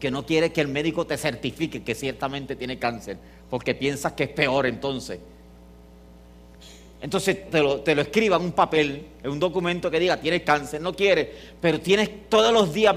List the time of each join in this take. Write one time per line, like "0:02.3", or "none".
0:07.5

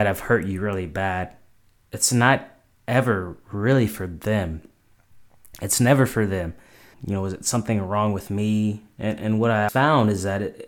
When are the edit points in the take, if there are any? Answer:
0:06.9
0:09.7

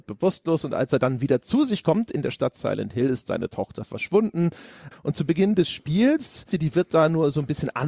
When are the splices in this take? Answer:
0:04.9
0:06.5

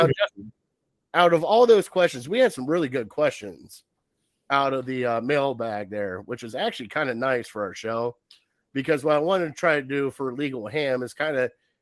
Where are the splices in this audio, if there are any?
none

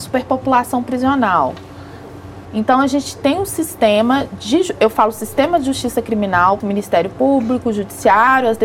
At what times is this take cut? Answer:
0:02.5
0:06.6

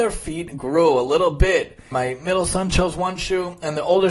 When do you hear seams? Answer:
0:01.9

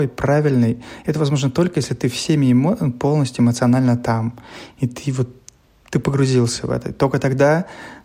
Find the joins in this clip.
0:05.7

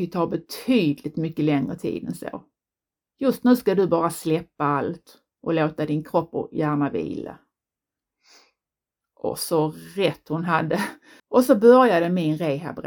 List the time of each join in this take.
0:11.2

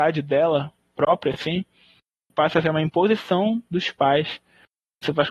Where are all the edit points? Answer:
none

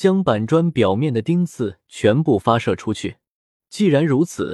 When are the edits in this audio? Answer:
0:03.6

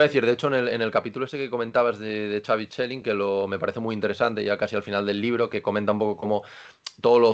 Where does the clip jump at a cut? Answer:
none

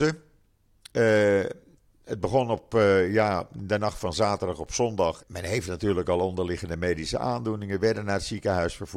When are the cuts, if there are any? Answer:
0:05.2

